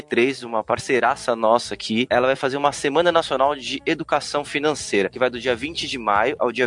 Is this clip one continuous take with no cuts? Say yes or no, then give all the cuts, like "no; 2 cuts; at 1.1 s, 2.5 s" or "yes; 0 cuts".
yes; 0 cuts